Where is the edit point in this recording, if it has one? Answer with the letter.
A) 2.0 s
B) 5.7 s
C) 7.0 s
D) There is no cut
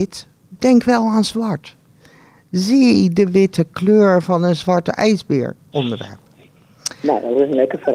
B